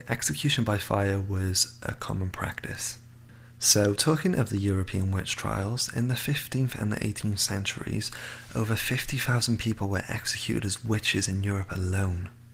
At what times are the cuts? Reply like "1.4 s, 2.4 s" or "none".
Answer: none